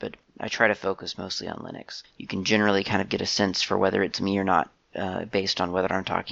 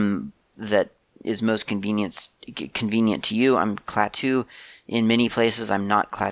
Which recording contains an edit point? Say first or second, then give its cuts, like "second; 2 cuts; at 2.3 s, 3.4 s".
first; 1 cut; at 2.0 s